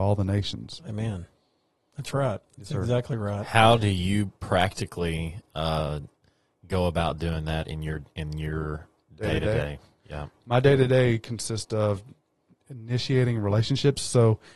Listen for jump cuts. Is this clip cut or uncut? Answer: uncut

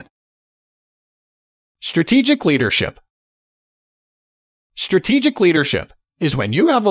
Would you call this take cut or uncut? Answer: uncut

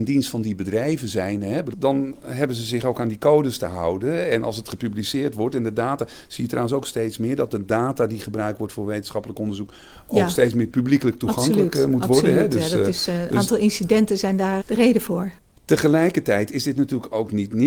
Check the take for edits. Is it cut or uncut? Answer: cut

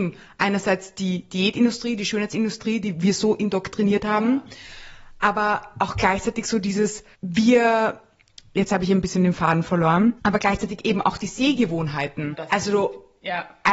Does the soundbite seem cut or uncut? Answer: cut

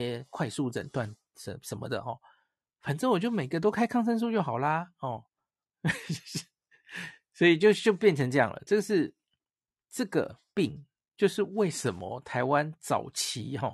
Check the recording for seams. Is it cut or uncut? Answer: uncut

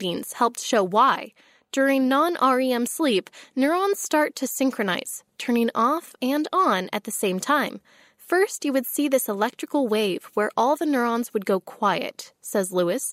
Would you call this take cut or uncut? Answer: uncut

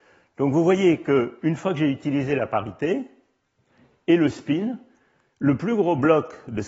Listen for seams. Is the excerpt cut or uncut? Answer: uncut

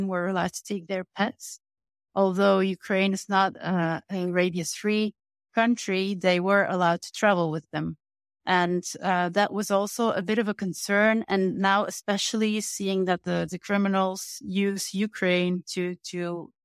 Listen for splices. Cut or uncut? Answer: uncut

